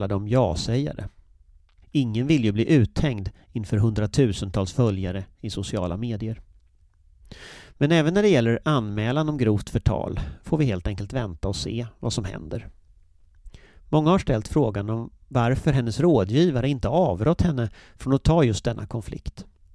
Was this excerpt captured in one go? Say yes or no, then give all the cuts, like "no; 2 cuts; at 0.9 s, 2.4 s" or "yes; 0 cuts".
no; 1 cut; at 1.8 s